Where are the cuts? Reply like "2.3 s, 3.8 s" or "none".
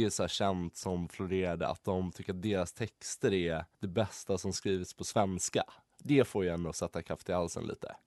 3.7 s